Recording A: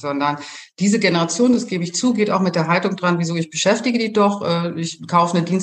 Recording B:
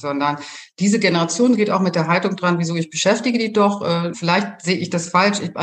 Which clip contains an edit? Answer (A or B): B